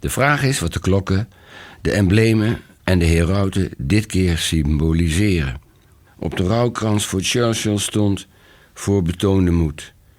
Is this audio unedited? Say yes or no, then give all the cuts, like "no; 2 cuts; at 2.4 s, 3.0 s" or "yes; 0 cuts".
no; 1 cut; at 6.1 s